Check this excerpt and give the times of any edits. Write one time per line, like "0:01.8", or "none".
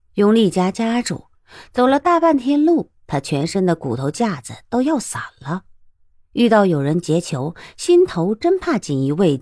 none